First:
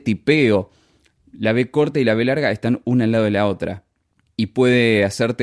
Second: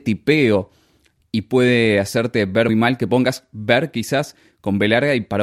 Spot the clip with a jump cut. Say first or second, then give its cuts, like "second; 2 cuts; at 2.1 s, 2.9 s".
second; 2 cuts; at 1.2 s, 2.7 s